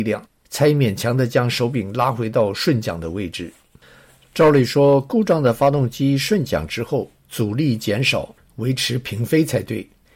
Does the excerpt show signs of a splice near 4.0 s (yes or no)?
no